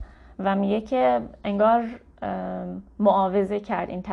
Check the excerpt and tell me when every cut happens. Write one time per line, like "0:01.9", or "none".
0:02.9